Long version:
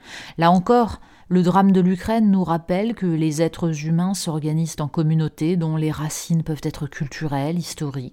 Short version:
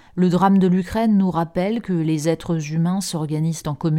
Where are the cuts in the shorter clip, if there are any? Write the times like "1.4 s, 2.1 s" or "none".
none